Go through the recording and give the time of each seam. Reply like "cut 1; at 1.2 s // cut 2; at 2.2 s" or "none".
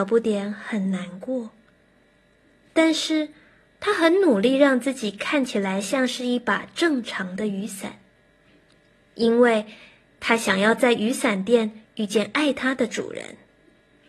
none